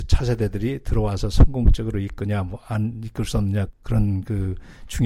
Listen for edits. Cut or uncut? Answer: cut